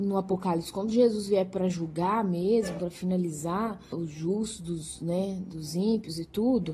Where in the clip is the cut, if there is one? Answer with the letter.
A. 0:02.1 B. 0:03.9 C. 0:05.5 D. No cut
B